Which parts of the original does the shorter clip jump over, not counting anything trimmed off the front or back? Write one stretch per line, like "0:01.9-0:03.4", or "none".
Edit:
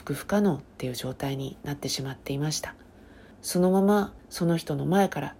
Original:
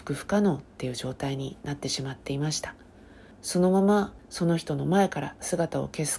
none